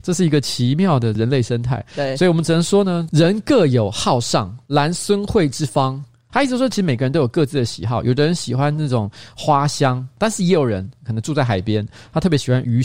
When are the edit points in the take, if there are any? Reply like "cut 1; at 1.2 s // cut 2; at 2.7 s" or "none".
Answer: cut 1; at 6.3 s